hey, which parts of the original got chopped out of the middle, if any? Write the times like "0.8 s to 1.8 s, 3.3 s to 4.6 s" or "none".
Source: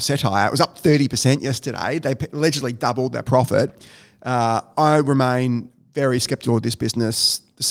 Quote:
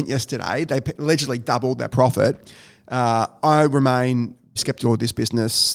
5.9 s to 6.2 s